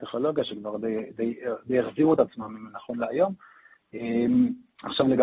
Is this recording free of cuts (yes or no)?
yes